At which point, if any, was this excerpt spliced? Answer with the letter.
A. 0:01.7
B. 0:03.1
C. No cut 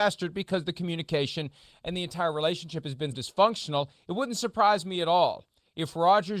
B